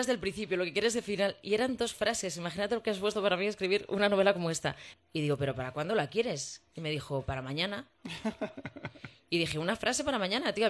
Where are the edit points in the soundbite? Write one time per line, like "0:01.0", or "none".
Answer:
0:04.9